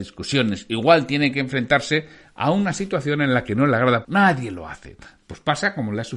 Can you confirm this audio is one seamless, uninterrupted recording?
no; 1 cut; at 4.0 s

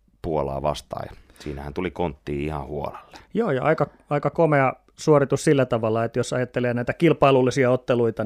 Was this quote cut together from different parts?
no; 0 cuts

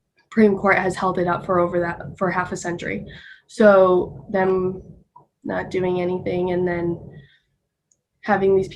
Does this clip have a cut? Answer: no; 0 cuts

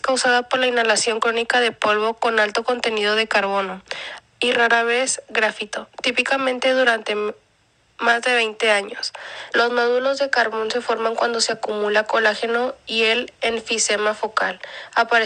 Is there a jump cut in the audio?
yes; 2 cuts; at 4.2 s, 9.5 s

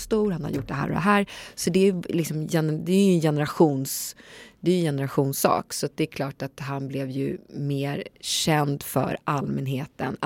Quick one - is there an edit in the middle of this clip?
no; 0 cuts

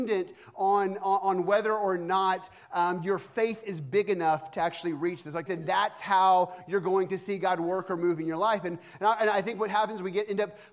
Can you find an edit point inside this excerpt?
yes; 1 cut; at 5.5 s

